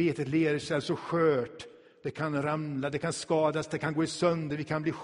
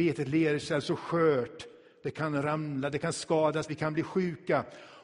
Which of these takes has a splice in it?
second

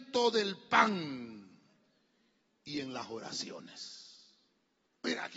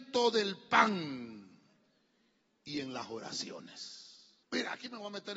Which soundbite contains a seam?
second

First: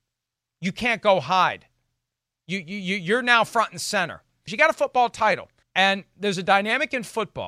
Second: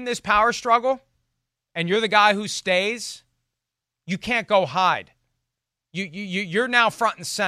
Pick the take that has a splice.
first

